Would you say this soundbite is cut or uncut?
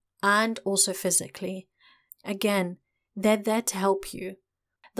cut